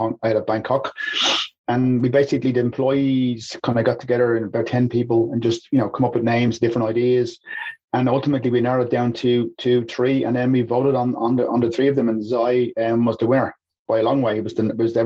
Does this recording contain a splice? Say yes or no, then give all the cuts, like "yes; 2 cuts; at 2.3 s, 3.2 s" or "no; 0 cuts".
no; 0 cuts